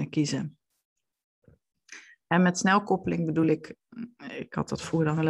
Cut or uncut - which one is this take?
uncut